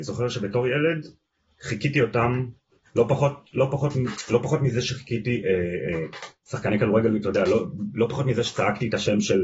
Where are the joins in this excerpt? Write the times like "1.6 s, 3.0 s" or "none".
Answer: none